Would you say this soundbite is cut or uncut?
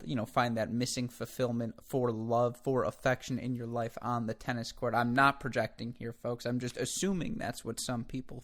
uncut